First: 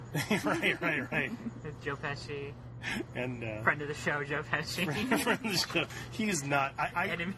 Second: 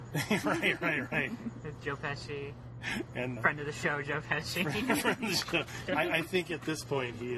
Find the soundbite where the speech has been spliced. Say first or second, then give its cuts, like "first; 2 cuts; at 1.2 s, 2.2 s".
second; 2 cuts; at 3.4 s, 5.9 s